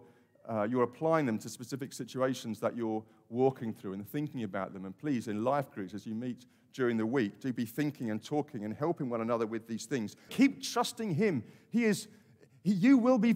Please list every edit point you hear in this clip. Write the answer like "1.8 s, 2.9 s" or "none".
10.3 s